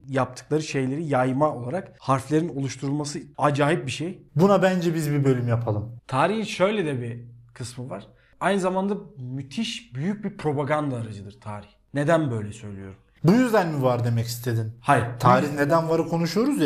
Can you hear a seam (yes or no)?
yes